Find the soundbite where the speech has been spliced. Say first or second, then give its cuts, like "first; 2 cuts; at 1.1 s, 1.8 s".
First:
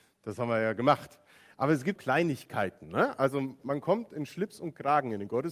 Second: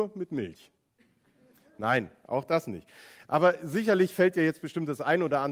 first; 1 cut; at 2.0 s